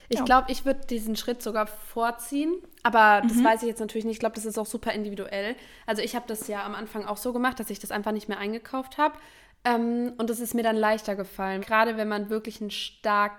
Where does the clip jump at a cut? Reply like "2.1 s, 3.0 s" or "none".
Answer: 11.6 s